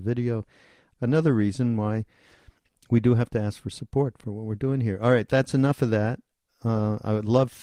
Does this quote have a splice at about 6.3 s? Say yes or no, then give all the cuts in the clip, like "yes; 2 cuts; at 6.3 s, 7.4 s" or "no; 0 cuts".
no; 1 cut; at 0.9 s